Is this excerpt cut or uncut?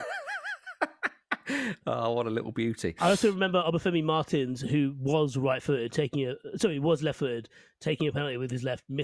uncut